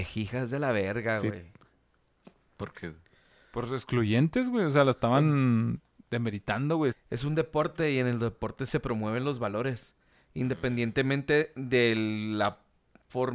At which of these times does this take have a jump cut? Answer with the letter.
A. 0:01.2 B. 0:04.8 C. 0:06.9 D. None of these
C